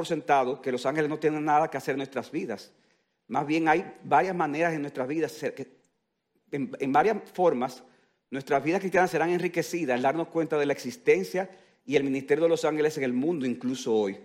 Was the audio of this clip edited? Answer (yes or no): no